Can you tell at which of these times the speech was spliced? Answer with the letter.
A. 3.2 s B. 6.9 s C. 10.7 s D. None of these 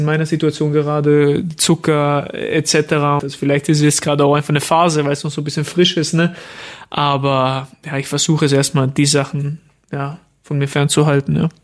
A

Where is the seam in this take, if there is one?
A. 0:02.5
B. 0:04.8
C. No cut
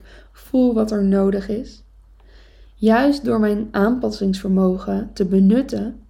C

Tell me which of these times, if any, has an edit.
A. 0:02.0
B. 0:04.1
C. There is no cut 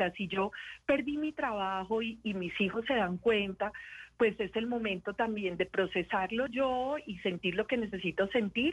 C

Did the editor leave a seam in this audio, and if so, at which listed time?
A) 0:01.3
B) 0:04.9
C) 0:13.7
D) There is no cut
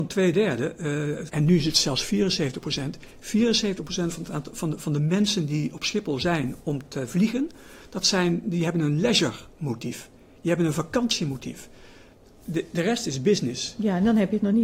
A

